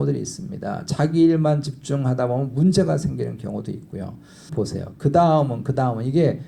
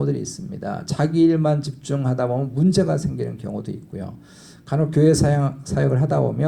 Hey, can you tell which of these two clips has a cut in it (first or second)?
first